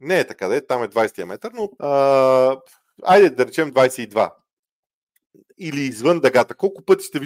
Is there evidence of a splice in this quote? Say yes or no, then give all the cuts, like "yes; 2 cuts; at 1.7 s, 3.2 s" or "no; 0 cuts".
yes; 1 cut; at 1.8 s